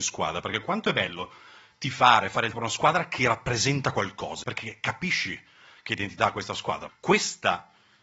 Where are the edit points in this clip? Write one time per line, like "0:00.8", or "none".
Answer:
0:02.5
0:04.4
0:06.9

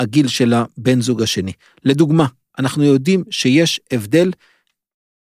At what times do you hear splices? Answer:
none

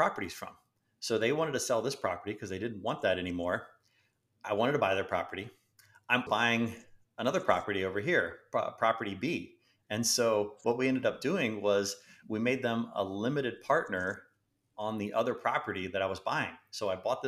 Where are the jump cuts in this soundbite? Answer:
0:06.3

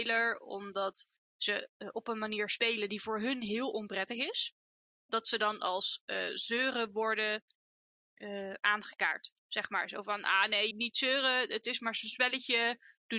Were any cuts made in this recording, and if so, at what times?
0:10.7

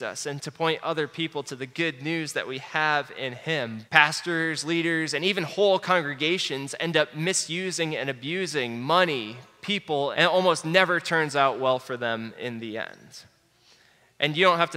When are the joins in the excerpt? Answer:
0:03.9
0:10.1

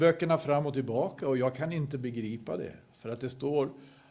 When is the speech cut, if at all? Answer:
none

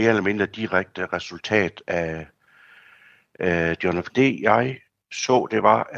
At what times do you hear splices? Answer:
0:04.1

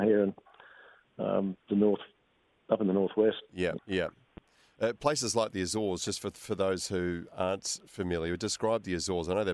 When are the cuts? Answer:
0:03.8

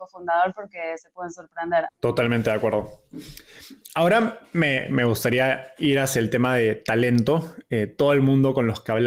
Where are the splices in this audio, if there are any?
0:01.9

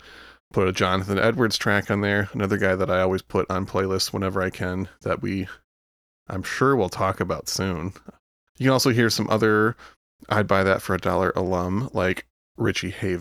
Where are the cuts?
0:08.5

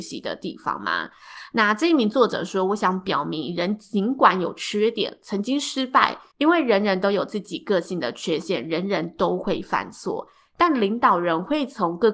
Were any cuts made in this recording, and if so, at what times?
0:06.3

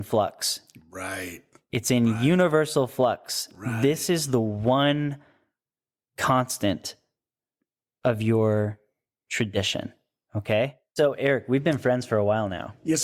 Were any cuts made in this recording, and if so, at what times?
none

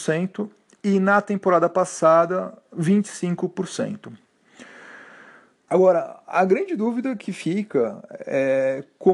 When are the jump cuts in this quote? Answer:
0:05.7

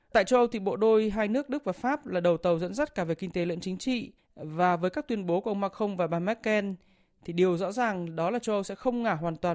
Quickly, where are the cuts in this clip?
none

